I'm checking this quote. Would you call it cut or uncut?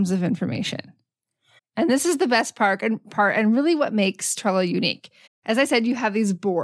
cut